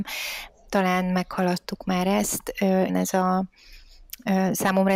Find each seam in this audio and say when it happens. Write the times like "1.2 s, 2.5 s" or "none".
2.9 s